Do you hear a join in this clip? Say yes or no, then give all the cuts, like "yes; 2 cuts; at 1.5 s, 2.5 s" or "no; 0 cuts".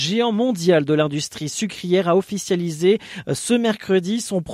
no; 0 cuts